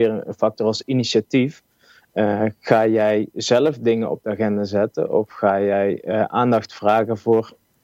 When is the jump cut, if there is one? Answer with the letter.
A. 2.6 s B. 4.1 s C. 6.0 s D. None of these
D